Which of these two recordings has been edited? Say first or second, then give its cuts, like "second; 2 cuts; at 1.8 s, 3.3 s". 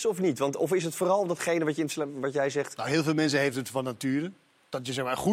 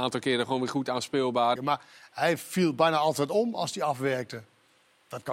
second; 1 cut; at 1.6 s